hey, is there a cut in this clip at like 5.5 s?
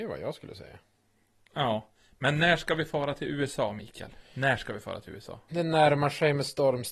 yes; 1 cut; at 5.5 s

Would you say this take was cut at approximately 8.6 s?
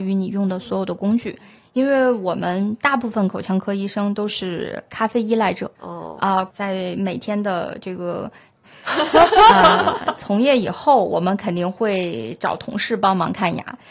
yes; 3 cuts; at 6.5 s, 8.6 s, 10.2 s

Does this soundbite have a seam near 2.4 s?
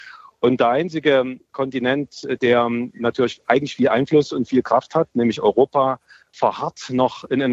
no; 0 cuts

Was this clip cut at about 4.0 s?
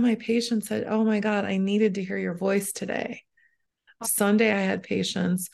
yes; 1 cut; at 4.0 s

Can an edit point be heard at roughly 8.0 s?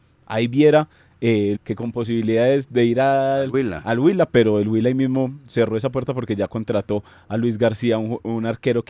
no; 1 cut; at 1.6 s

